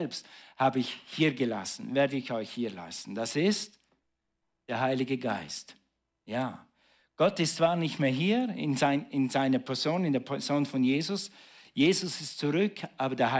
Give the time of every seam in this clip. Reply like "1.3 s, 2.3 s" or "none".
none

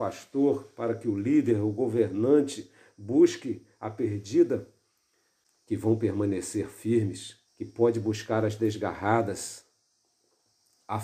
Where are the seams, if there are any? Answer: 5.5 s, 7.5 s

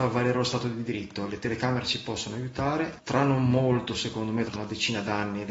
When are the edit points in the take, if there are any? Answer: 3.0 s, 4.5 s

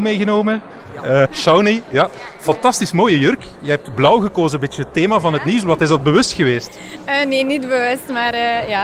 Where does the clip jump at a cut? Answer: 1.2 s

